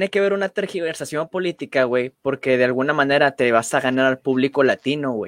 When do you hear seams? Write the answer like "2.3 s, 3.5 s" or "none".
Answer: none